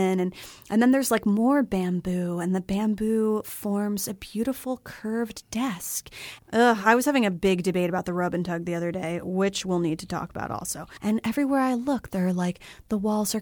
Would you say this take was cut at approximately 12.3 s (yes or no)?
no